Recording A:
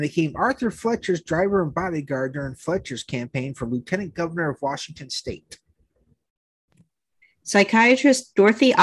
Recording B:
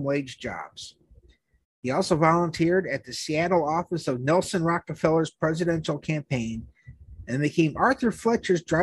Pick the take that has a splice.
A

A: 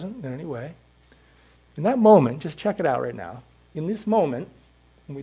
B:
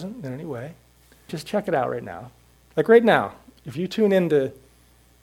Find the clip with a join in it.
B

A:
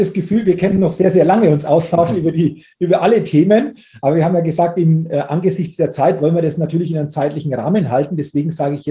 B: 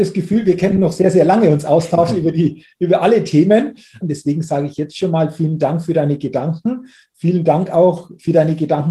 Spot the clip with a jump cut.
B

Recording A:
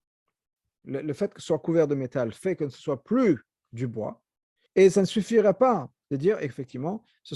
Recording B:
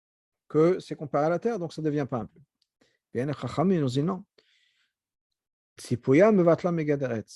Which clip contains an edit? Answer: A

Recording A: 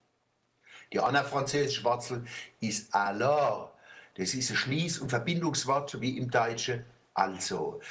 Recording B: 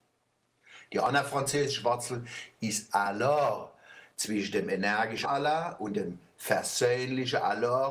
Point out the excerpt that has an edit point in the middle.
B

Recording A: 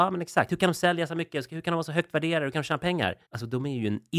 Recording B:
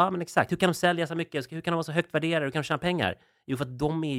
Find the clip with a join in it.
A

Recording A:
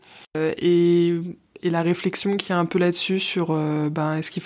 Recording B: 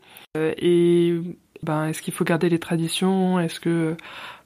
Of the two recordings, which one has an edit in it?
B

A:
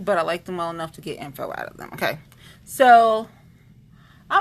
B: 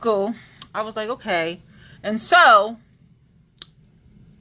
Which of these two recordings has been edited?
B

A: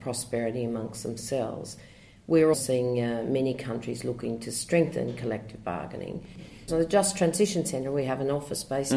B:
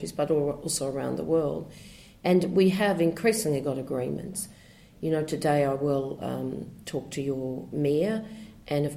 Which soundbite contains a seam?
A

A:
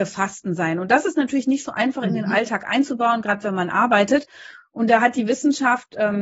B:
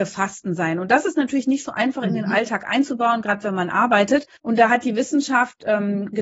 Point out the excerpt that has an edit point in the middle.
B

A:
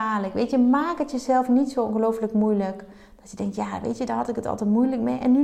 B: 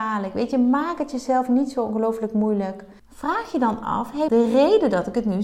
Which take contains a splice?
B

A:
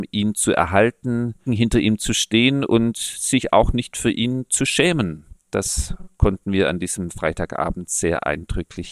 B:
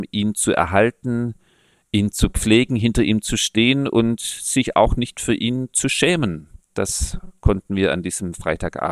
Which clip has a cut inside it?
A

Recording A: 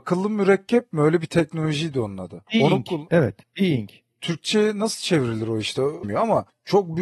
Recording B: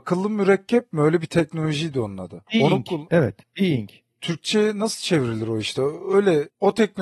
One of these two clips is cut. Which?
A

